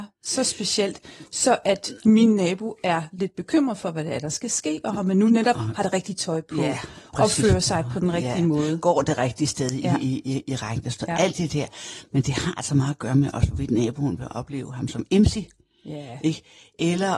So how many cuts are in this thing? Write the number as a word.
zero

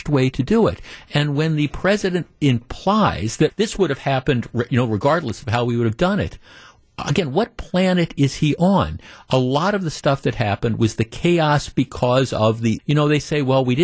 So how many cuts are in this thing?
two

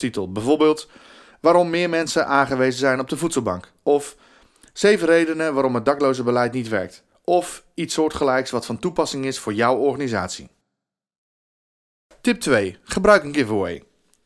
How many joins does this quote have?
zero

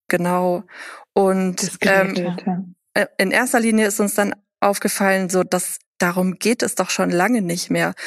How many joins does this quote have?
one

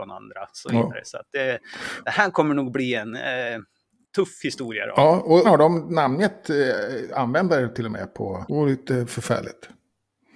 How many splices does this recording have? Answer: two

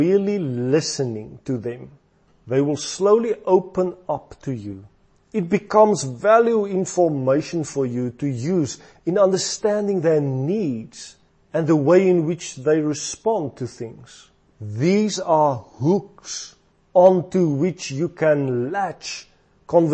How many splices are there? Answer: three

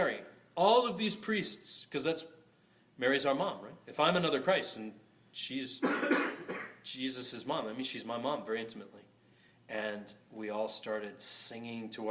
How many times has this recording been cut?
zero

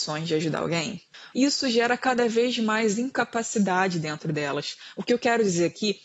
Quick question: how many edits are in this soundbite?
one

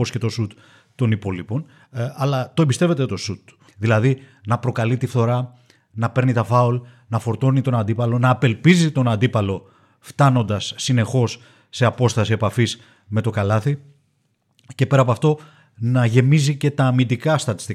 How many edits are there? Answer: one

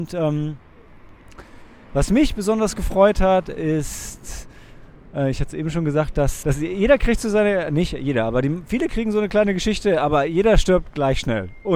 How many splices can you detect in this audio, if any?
one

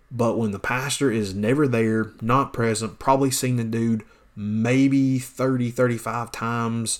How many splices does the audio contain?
zero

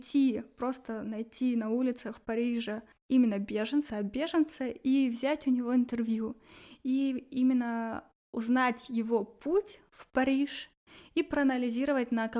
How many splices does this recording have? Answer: one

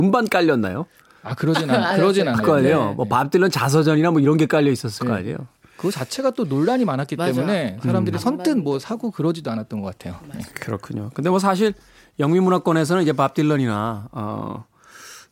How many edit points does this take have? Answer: one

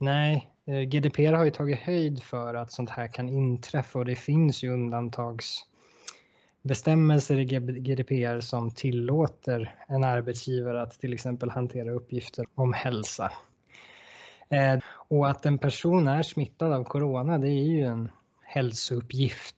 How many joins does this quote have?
two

